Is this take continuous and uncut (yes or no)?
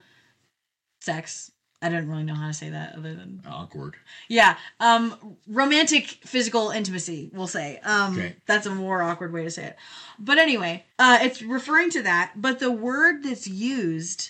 no